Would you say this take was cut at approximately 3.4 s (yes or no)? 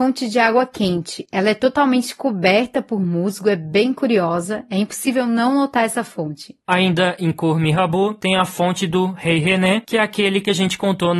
no